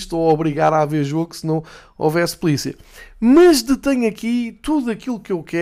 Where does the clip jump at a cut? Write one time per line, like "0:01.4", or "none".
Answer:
none